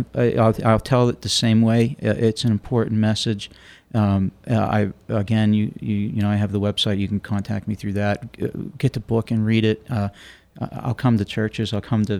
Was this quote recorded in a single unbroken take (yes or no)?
yes